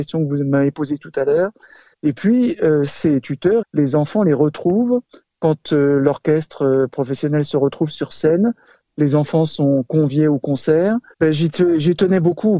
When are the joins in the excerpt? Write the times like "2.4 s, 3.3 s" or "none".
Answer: 1.9 s, 3.6 s, 11.1 s